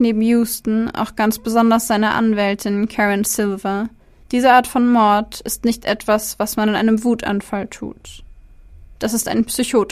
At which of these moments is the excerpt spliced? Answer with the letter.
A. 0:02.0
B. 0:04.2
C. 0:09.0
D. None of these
B